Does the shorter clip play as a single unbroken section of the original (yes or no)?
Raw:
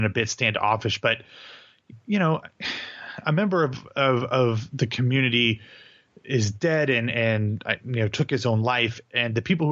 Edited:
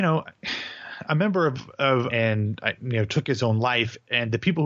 no